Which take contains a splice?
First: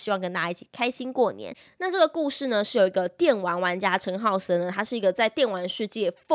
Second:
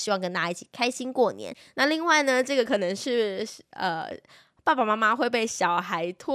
second; 1 cut; at 1.7 s

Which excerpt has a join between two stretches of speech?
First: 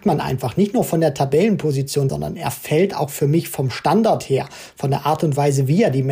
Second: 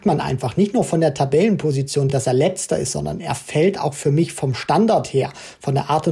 first; 1 cut; at 2.1 s

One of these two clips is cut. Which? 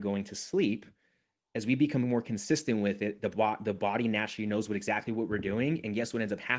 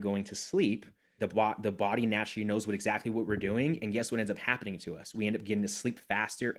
second; 1 cut; at 1.2 s

